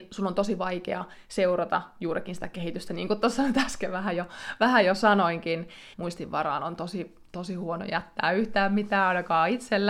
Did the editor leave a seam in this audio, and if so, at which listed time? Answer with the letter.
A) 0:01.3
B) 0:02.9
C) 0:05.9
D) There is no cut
C